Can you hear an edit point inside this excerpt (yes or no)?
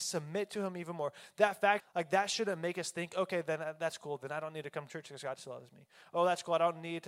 yes